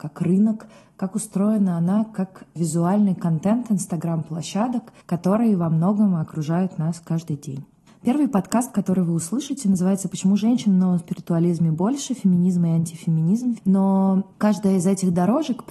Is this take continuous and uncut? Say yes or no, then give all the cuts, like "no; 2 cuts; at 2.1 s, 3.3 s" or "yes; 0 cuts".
no; 2 cuts; at 5.0 s, 13.6 s